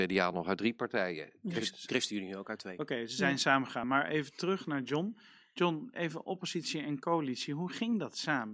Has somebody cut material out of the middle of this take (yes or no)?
no